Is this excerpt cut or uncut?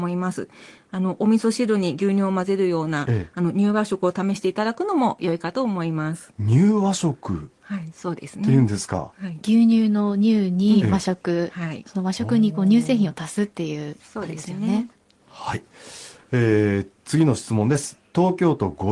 uncut